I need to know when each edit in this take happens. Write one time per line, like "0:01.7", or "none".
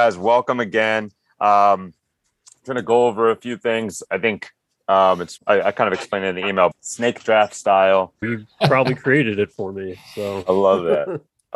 0:05.4
0:06.7
0:08.2